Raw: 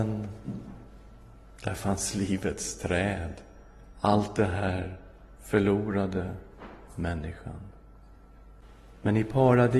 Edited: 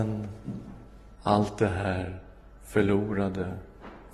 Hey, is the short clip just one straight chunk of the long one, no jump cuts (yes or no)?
no